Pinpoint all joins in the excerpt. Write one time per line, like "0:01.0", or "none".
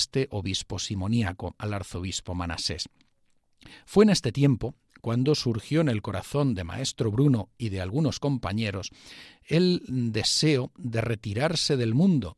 none